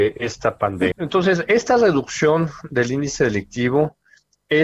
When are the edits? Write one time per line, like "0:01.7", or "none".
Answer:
0:00.9